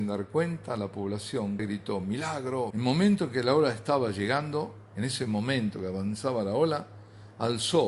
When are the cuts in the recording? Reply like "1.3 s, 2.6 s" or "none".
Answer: 1.6 s, 2.7 s